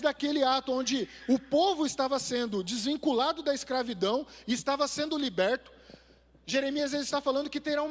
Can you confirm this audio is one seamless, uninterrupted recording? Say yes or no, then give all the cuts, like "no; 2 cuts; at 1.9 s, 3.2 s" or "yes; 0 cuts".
yes; 0 cuts